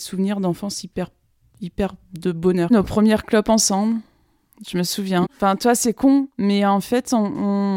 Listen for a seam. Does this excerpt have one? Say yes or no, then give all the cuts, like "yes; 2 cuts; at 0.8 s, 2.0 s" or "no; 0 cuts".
yes; 1 cut; at 5.2 s